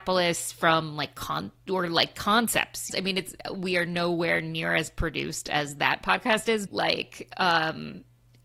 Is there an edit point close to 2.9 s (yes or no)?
yes